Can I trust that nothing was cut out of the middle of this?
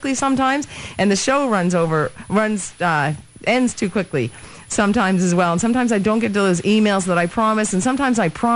yes; 0 cuts

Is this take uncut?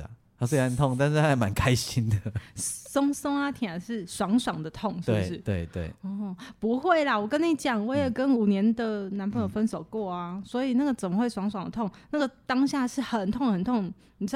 yes; 0 cuts

